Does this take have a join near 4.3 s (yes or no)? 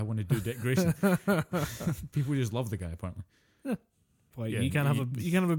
yes